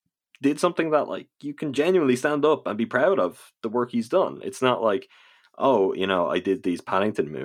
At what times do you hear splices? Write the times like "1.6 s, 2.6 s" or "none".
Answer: none